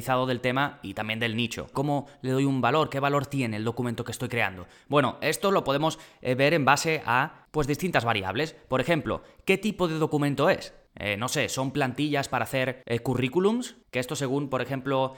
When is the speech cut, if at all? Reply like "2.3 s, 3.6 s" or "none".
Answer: 1.7 s